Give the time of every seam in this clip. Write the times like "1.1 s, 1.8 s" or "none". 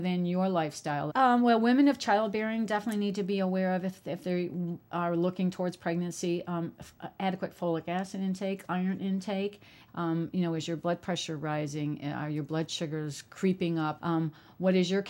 1.1 s, 9.9 s, 14.0 s